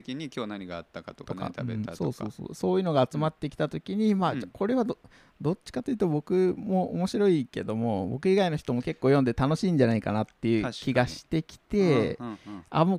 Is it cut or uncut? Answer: uncut